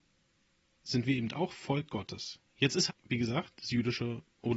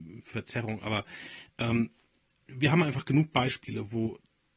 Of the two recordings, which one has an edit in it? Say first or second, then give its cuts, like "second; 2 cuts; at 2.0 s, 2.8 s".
first; 1 cut; at 2.9 s